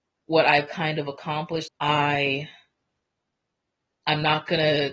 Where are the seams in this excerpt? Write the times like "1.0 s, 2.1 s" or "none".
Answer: 1.7 s